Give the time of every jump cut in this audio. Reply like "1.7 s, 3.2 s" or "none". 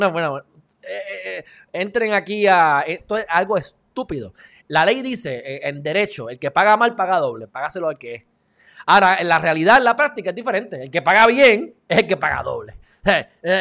3.0 s, 7.5 s